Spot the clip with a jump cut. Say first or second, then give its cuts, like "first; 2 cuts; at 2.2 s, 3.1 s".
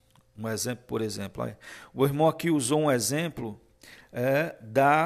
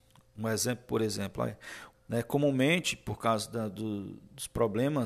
second; 1 cut; at 1.9 s